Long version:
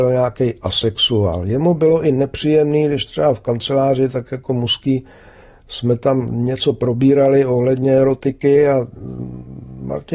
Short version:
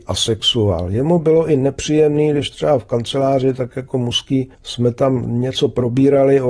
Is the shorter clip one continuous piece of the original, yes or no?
no